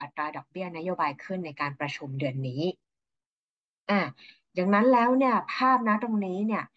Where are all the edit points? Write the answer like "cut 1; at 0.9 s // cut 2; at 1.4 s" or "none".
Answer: none